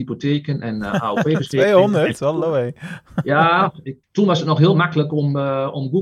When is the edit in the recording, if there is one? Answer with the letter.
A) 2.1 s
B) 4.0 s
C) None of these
B